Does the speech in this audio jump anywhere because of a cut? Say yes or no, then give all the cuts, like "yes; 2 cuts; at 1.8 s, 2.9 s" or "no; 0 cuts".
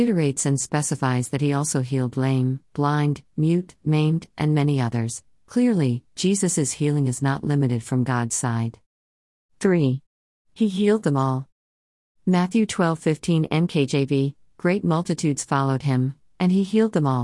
no; 0 cuts